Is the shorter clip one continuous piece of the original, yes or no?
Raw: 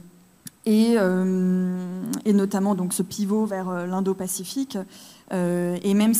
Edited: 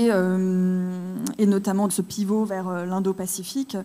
no